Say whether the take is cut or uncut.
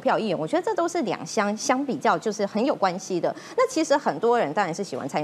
cut